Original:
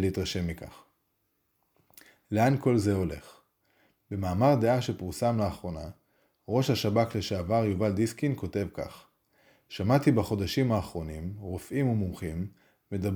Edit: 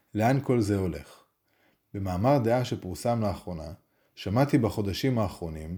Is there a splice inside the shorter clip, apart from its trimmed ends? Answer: yes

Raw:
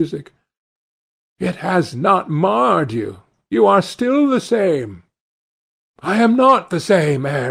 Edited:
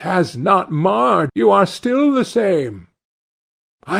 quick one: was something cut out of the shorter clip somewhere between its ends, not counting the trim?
yes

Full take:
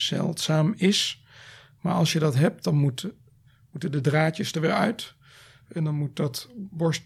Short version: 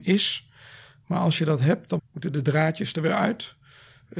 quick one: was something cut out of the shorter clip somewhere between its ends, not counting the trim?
yes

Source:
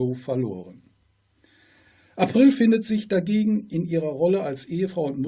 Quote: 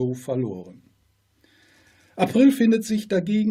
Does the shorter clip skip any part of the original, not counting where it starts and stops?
no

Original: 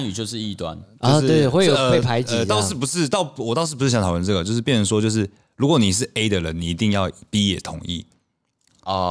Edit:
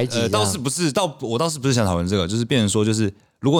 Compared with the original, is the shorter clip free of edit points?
yes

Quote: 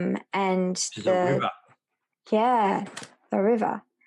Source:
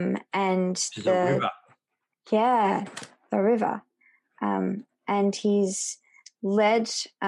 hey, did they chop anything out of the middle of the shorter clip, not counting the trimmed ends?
no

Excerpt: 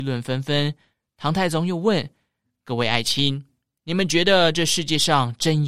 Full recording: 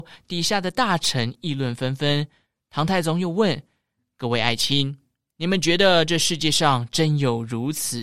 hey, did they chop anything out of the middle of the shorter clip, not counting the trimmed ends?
no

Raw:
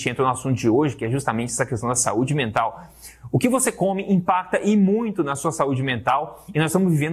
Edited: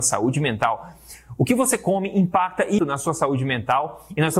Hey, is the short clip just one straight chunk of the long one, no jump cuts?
no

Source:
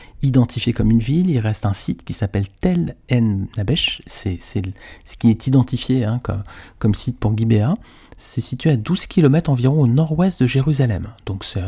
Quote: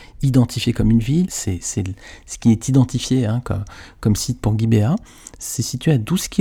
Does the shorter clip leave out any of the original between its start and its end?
yes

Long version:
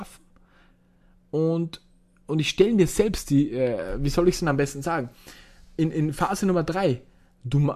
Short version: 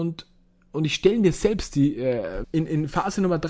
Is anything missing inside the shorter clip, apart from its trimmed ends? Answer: yes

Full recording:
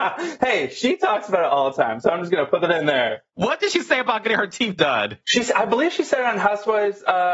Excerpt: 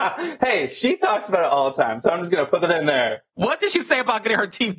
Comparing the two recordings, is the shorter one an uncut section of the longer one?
yes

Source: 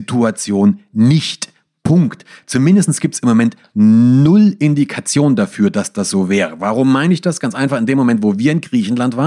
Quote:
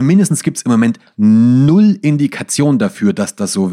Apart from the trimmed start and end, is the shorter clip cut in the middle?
no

